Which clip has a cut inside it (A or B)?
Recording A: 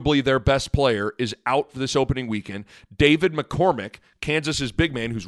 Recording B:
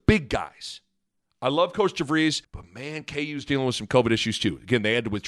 B